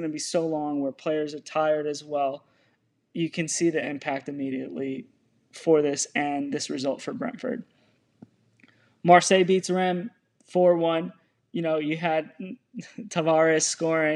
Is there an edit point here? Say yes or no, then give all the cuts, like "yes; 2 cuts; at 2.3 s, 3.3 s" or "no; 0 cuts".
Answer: no; 0 cuts